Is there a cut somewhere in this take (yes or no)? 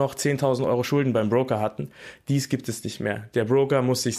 no